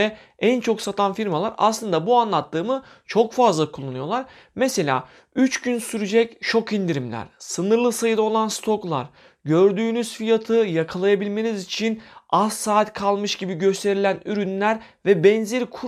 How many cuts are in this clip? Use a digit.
0